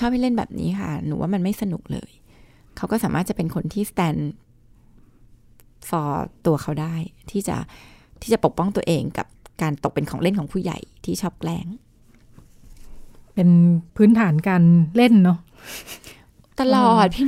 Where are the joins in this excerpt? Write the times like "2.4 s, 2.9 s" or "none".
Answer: 13.9 s